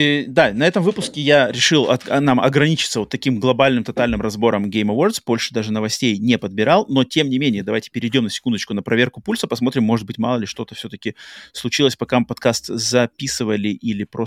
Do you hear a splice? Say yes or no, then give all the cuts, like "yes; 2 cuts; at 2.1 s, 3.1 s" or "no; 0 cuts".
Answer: no; 0 cuts